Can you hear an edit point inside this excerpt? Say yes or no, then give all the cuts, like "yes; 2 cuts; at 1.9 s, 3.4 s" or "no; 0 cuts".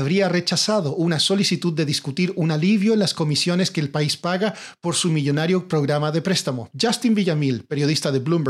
yes; 1 cut; at 6.7 s